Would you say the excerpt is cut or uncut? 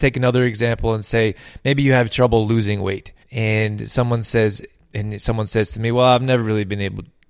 cut